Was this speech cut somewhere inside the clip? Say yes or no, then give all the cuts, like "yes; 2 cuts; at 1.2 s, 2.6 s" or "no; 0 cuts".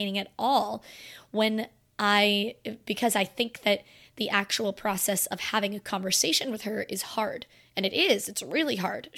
no; 0 cuts